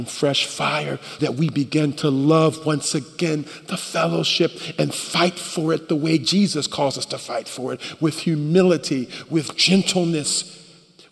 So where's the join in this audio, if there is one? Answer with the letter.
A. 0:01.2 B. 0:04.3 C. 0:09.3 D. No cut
A